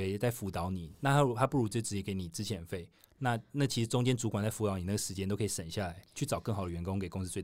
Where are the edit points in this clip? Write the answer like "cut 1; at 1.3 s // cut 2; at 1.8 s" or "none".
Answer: none